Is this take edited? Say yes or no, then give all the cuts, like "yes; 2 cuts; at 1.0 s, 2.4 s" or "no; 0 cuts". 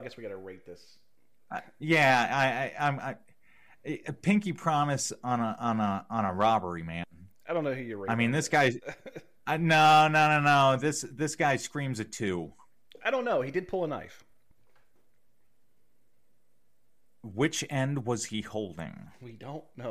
no; 0 cuts